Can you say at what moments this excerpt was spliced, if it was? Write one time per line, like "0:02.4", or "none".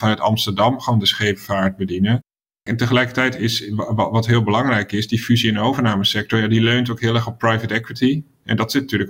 0:02.7